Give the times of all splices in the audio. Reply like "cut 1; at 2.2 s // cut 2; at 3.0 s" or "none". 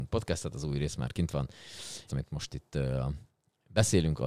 cut 1; at 2.1 s